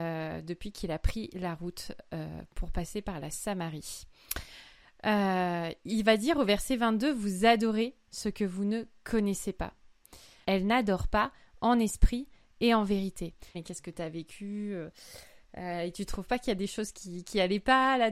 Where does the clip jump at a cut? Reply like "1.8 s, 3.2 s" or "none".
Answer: 10.4 s, 13.5 s